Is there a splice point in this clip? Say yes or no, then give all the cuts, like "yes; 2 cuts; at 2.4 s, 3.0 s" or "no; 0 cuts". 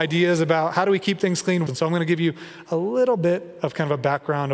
yes; 1 cut; at 1.7 s